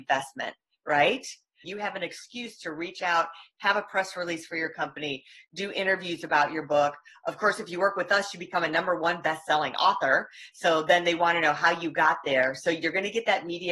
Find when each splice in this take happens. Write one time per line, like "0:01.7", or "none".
0:01.6